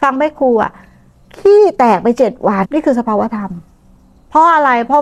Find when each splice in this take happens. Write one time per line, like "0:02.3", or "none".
0:02.6